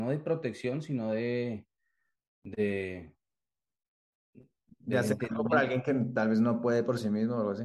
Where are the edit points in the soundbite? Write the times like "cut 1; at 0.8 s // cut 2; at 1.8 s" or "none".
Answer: none